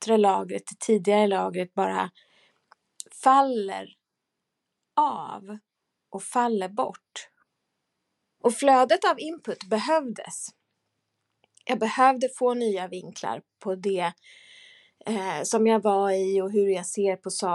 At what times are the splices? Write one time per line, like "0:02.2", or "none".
0:08.4